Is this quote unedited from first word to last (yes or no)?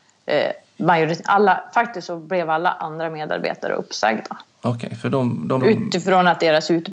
no